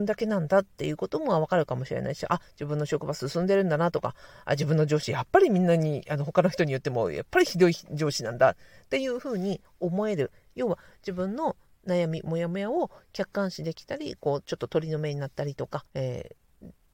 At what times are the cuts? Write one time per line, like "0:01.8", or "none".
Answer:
0:15.9